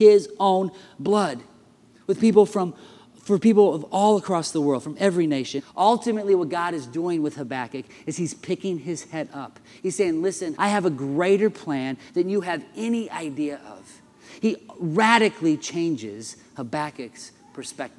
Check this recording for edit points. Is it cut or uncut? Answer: cut